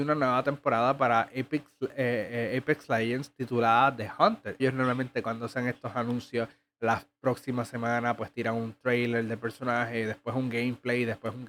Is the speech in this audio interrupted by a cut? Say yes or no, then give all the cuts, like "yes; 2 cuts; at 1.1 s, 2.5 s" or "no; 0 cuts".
yes; 1 cut; at 4.6 s